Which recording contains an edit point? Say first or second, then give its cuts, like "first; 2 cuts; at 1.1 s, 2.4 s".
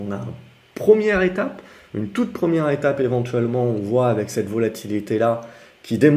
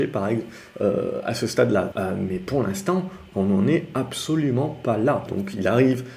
second; 2 cuts; at 1.9 s, 5.3 s